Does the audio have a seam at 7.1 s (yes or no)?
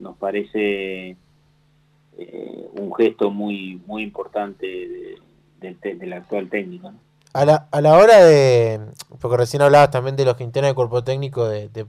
no